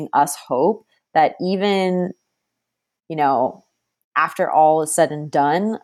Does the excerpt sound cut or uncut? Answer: uncut